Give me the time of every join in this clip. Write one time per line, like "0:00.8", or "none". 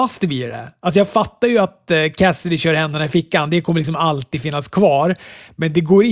none